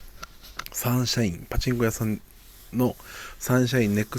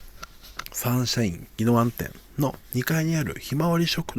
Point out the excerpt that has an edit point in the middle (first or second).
second